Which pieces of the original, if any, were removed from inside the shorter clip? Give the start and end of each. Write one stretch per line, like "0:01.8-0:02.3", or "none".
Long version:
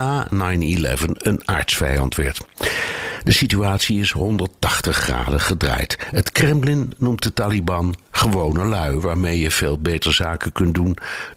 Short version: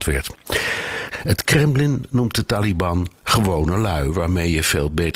0:03.2-0:06.0